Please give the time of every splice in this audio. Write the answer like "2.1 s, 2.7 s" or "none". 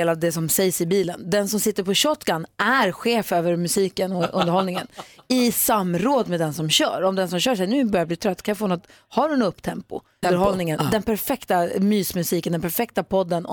10.2 s